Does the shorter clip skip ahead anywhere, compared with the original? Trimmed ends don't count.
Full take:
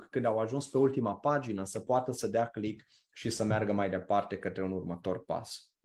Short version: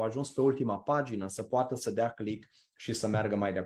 no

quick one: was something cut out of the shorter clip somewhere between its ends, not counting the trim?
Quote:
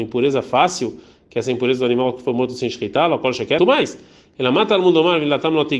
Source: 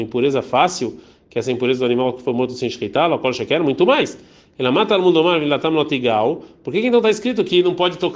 yes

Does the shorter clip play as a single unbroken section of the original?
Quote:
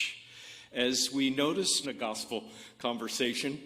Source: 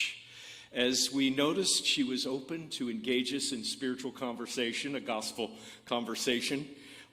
no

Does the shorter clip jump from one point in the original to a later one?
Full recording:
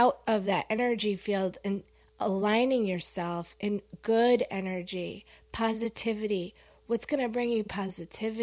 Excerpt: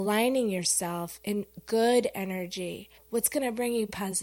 yes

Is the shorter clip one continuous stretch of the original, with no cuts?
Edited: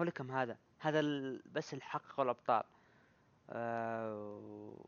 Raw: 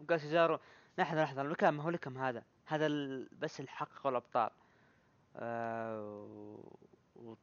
yes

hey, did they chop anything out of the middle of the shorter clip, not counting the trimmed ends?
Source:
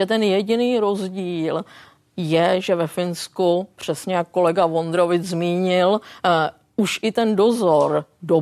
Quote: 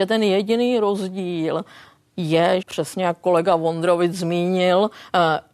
yes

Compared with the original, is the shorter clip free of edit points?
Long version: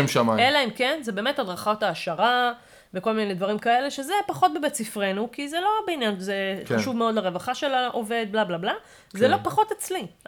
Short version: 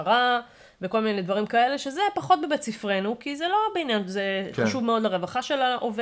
yes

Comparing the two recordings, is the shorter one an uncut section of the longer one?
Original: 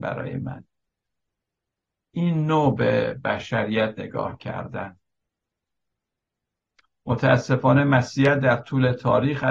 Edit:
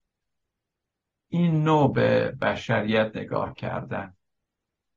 yes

